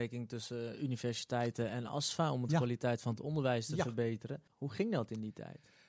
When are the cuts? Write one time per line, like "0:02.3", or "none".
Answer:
0:04.5